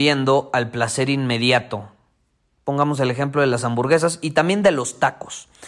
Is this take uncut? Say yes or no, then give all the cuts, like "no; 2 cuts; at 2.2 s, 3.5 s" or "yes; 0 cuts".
yes; 0 cuts